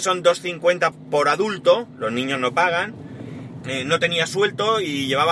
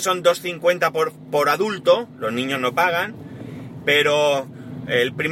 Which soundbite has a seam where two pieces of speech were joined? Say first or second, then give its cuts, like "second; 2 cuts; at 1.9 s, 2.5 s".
first; 2 cuts; at 0.9 s, 3.6 s